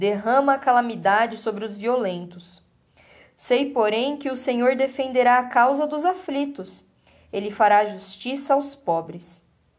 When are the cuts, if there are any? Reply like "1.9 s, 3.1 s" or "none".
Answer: none